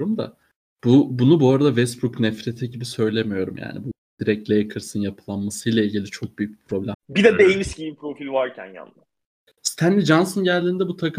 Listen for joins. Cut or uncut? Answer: cut